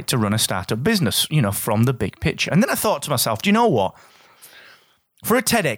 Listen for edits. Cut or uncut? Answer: uncut